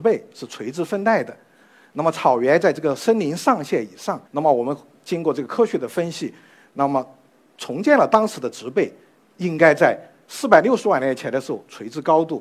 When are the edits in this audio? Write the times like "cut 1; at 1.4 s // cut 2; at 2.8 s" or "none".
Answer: cut 1; at 4.3 s